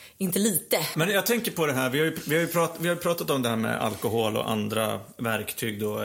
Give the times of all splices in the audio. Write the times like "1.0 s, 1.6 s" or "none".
0.9 s